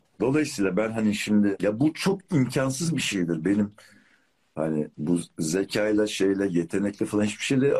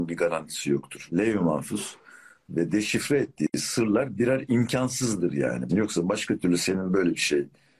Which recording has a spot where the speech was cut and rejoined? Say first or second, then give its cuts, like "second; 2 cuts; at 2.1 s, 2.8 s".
second; 2 cuts; at 1.1 s, 5.7 s